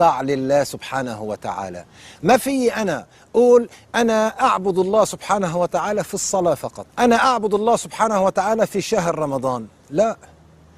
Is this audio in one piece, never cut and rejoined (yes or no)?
no